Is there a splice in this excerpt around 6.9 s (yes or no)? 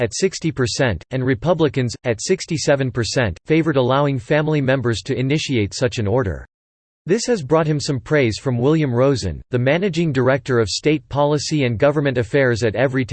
yes